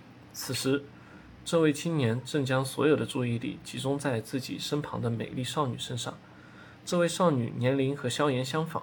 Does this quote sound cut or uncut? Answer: uncut